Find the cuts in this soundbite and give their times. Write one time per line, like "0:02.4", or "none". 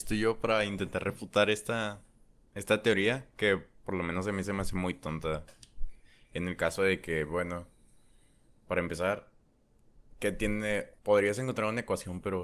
0:11.0

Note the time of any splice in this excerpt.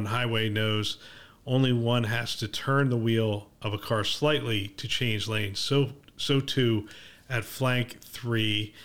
none

